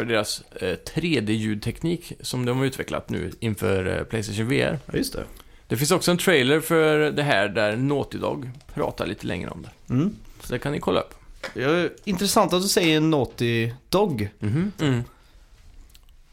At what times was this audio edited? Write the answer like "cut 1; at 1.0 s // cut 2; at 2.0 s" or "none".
cut 1; at 14.8 s